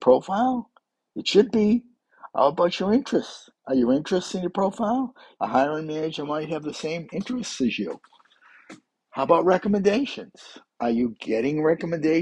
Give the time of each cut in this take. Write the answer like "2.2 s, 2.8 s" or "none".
5.4 s